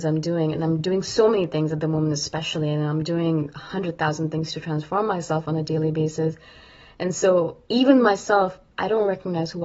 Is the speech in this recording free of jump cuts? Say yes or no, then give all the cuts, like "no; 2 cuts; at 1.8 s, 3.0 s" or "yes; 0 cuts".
no; 1 cut; at 7.6 s